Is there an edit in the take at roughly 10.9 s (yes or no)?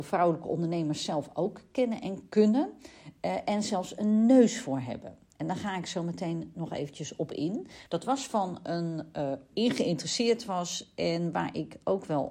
no